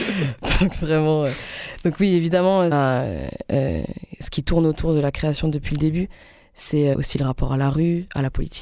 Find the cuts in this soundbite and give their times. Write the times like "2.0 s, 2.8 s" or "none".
2.7 s, 6.9 s